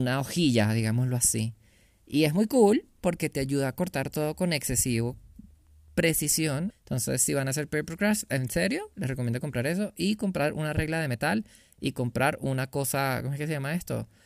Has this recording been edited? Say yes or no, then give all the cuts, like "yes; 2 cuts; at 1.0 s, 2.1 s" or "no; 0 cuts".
yes; 1 cut; at 6.7 s